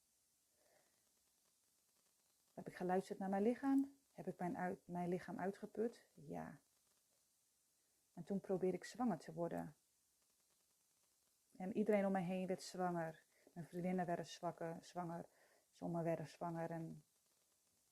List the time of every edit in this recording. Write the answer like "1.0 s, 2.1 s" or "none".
4.0 s